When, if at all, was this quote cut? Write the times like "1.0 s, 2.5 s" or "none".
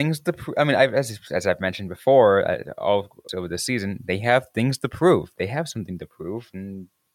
3.3 s

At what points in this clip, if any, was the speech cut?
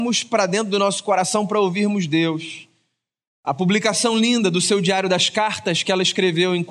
3.3 s

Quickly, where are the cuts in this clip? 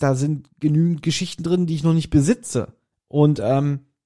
2.9 s

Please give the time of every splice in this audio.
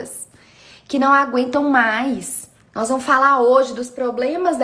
2.6 s

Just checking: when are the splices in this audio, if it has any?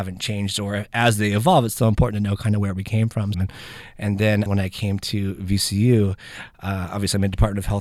3.3 s, 4.5 s

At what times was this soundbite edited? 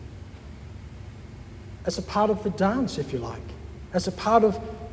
1.8 s

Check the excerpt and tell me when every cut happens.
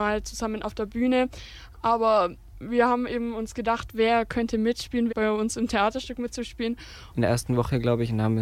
5.1 s, 7.1 s

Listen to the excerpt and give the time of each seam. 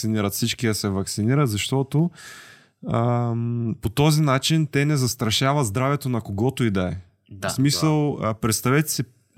none

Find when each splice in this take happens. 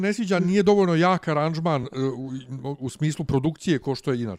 none

